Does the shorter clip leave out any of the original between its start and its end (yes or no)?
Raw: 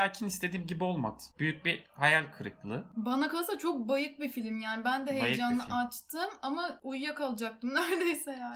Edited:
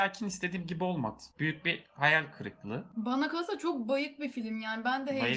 no